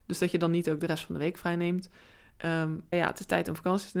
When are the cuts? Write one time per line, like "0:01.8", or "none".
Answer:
0:02.9